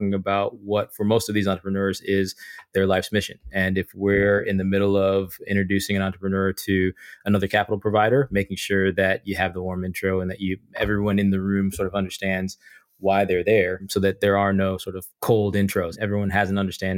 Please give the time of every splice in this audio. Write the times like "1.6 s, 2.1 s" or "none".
15.1 s